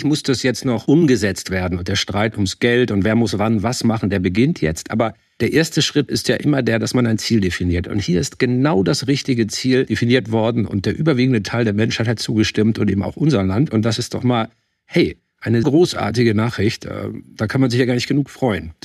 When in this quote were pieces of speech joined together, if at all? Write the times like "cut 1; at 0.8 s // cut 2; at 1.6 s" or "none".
cut 1; at 15.6 s